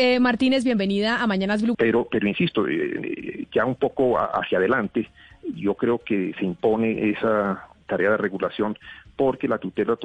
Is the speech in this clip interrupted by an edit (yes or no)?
yes